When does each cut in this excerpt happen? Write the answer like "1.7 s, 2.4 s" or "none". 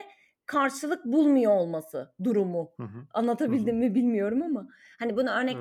none